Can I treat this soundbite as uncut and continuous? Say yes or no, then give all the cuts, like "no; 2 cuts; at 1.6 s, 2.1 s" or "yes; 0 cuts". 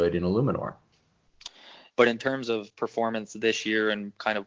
no; 1 cut; at 1.9 s